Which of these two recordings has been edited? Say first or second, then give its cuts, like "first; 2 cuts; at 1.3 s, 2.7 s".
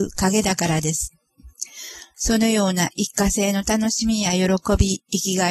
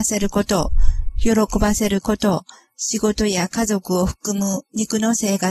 first; 1 cut; at 2.1 s